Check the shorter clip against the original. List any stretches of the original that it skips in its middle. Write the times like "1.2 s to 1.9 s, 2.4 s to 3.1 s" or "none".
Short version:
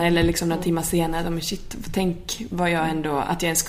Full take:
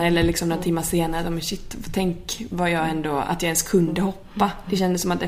none